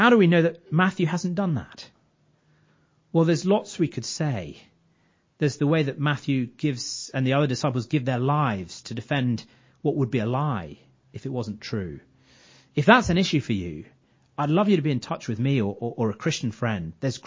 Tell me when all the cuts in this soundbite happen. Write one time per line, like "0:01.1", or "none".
none